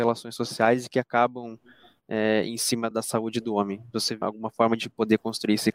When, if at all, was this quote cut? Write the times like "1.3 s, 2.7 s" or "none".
2.9 s, 4.2 s